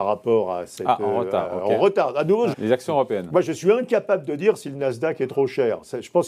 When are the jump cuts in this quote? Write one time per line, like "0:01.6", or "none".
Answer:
0:02.5